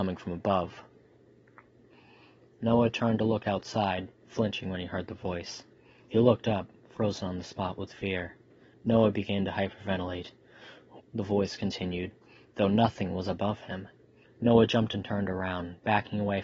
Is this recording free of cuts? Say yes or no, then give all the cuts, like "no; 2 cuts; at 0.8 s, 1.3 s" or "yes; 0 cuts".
no; 3 cuts; at 8.7 s, 11.0 s, 14.2 s